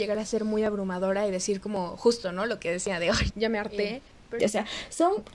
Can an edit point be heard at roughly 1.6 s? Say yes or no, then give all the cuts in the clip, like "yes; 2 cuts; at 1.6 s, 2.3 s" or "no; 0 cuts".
no; 2 cuts; at 3.3 s, 4.4 s